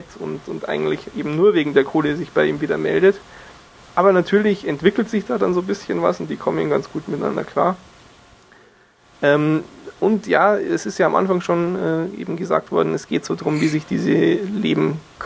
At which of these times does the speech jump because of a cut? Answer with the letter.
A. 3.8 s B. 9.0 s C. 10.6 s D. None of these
D